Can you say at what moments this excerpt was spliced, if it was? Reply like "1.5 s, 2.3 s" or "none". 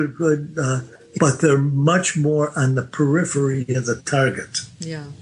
1.2 s